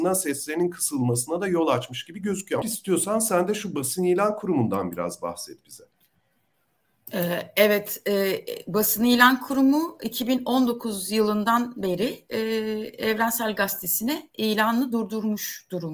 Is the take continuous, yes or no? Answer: no